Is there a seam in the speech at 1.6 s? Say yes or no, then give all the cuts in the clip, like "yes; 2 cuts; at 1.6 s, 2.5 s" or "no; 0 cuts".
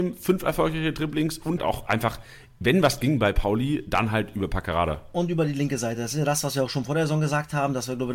yes; 1 cut; at 1.6 s